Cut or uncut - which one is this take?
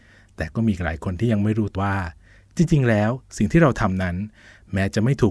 cut